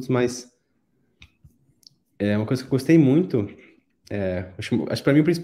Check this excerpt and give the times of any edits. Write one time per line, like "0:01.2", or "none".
none

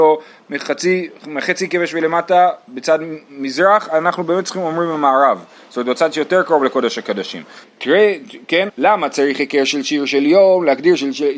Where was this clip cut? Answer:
0:07.6
0:08.7

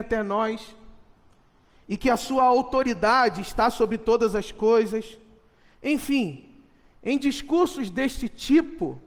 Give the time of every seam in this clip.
none

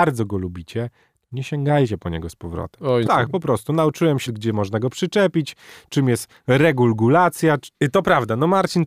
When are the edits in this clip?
0:03.1
0:04.3
0:07.7

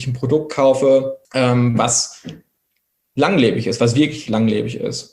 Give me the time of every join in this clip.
0:01.2

